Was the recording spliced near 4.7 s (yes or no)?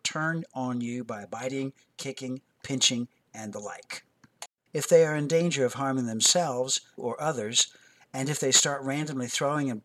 yes